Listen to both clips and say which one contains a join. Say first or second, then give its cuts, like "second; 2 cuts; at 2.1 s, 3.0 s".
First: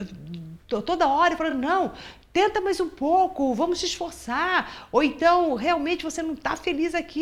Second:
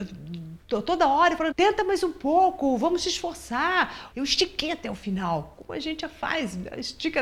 second; 2 cuts; at 1.5 s, 4.1 s